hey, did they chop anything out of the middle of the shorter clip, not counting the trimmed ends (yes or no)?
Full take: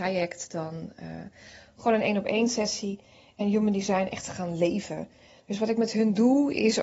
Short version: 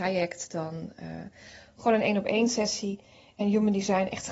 no